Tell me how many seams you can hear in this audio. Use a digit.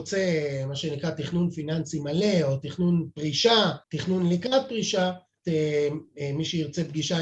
2